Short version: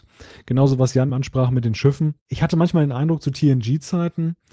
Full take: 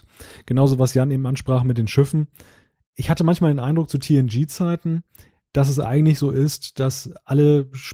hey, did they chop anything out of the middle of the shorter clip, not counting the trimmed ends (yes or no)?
yes